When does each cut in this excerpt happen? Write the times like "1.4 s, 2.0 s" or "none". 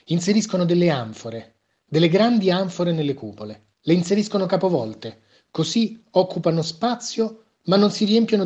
3.7 s